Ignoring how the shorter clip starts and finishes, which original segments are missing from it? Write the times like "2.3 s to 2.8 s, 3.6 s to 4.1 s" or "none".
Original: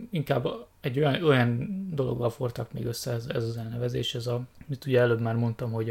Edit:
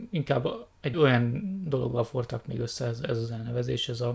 0.9 s to 1.2 s